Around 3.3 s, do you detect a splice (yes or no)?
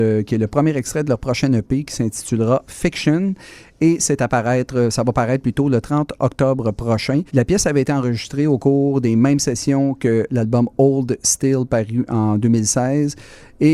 no